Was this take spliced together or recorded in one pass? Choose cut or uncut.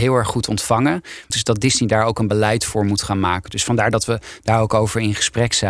cut